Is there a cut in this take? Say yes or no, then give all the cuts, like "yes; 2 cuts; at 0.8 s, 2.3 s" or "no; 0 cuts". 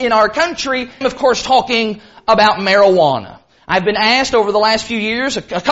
yes; 1 cut; at 1.0 s